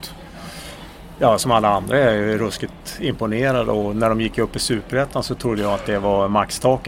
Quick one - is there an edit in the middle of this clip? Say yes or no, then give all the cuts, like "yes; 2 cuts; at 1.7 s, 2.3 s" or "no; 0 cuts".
no; 0 cuts